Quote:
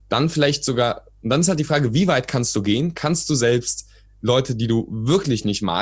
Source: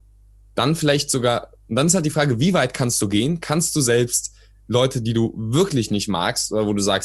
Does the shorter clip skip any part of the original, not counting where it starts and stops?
no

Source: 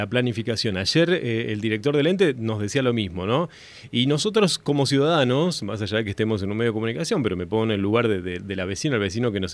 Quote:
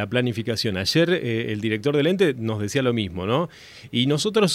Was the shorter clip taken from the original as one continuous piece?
yes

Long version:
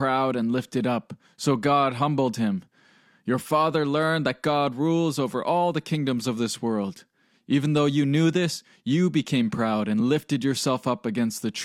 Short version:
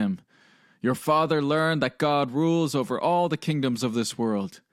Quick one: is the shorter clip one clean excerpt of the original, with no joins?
yes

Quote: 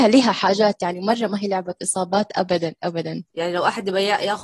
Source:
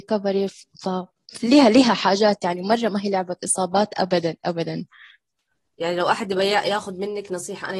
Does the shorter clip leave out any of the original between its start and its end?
yes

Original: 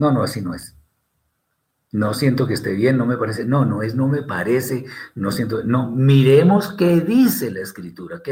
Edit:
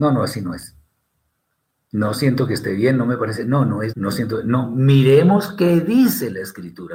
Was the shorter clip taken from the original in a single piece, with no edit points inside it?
no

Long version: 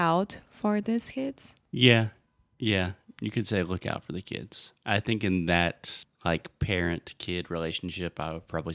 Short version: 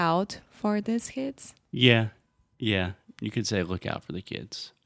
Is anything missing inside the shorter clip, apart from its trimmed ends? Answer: no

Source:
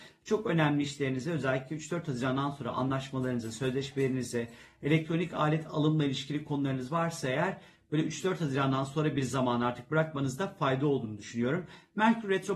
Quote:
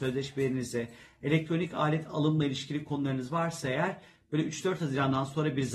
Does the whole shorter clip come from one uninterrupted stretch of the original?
yes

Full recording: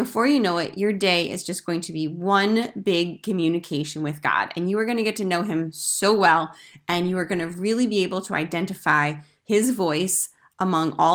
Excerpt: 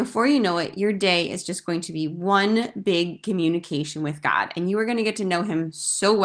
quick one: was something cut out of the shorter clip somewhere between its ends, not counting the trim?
no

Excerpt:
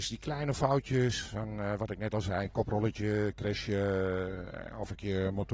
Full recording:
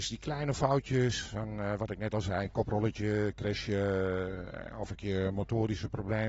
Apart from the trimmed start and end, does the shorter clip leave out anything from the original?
no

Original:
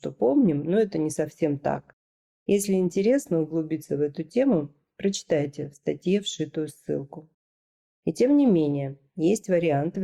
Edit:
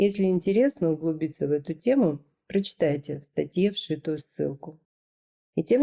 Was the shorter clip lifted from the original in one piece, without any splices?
yes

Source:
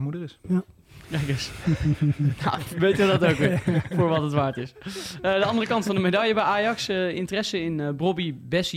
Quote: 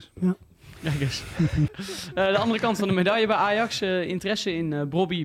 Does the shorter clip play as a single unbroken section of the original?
no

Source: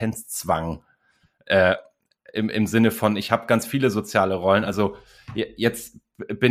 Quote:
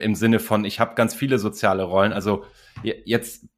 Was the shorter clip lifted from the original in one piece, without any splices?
yes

